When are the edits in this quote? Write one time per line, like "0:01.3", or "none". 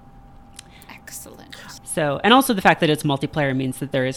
0:01.8